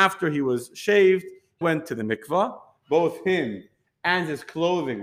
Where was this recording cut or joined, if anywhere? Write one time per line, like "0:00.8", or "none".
0:01.6